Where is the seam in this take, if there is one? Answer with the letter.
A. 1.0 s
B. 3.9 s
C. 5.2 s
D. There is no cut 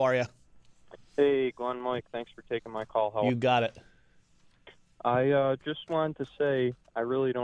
D